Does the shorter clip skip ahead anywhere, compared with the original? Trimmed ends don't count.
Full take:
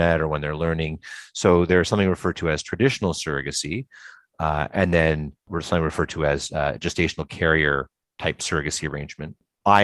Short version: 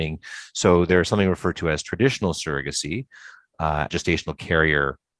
yes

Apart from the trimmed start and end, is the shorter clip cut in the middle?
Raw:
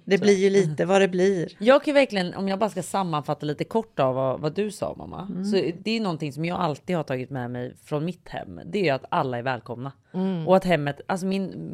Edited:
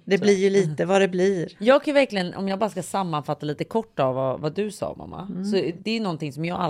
no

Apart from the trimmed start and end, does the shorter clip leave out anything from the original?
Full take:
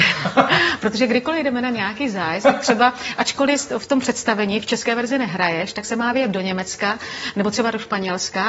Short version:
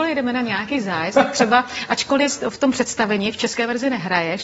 no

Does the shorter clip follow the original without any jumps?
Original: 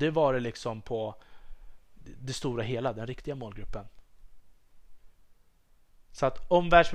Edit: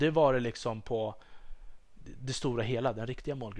yes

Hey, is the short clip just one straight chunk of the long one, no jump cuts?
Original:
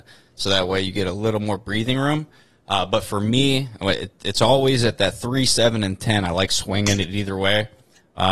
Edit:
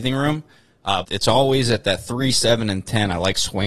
no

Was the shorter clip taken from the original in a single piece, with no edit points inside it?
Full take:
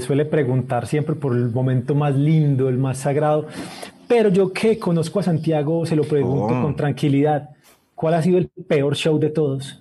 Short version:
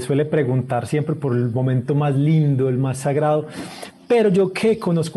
yes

